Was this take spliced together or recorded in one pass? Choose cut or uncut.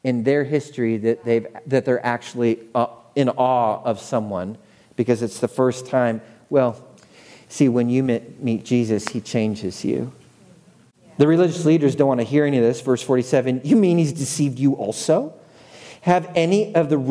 uncut